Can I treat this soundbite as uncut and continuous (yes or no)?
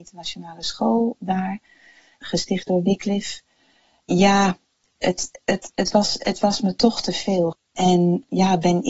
no